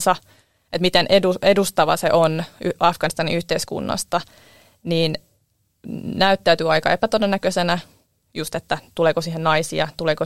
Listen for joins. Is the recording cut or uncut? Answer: uncut